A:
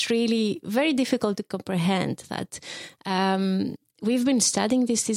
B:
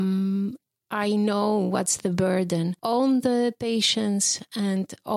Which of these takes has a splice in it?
B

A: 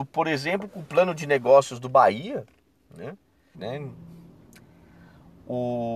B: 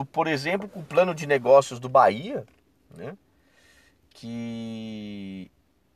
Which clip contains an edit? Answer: A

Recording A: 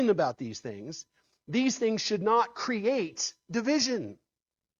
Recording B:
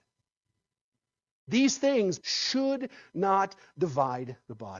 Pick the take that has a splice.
B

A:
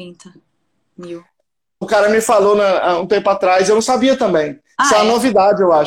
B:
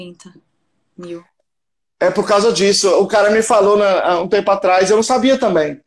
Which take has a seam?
A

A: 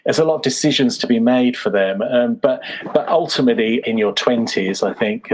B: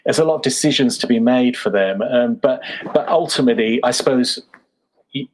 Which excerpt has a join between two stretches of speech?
A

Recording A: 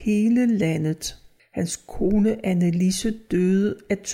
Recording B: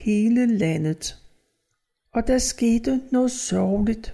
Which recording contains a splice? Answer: A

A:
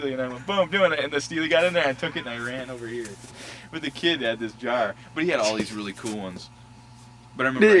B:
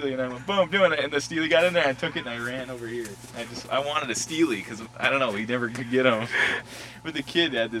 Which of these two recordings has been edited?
A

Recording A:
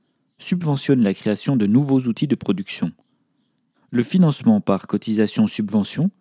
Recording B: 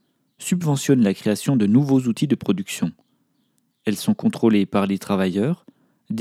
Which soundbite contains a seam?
A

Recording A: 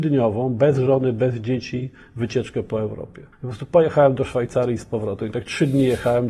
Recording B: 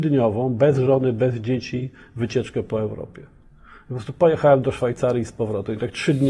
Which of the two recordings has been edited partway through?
A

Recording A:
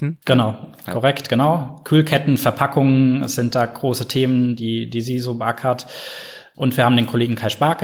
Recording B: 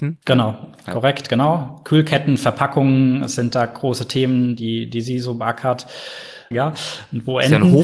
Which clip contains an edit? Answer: B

